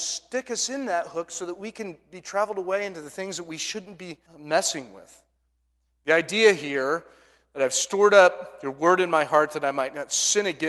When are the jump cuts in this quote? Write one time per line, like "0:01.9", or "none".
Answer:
0:04.3